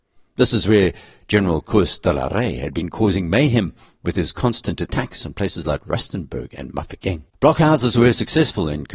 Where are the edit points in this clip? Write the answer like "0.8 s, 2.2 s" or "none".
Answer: 7.3 s